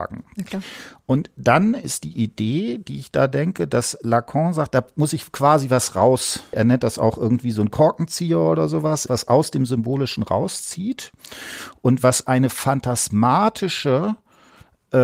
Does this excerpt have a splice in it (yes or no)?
yes